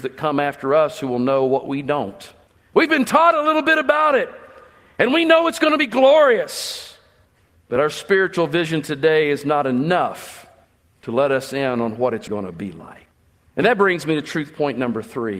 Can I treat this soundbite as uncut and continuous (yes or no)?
no